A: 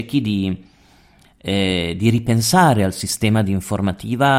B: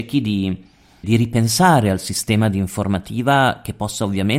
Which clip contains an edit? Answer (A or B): B